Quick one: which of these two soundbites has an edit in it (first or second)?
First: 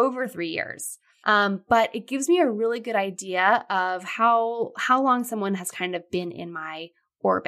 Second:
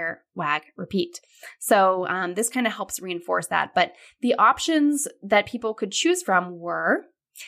first